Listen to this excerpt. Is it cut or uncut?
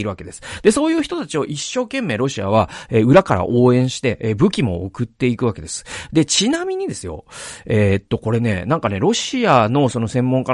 uncut